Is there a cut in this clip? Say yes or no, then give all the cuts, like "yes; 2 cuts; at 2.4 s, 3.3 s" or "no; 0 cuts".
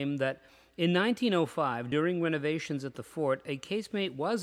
no; 0 cuts